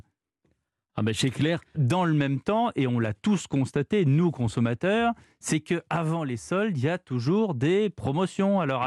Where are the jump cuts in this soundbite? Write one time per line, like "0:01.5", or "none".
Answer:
0:01.7